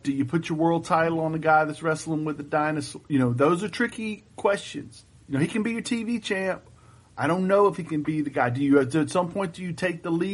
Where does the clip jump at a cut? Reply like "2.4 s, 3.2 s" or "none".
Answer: none